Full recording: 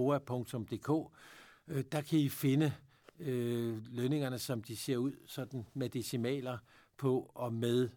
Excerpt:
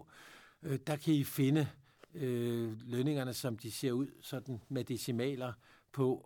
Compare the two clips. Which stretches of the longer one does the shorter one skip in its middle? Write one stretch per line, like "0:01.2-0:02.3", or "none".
none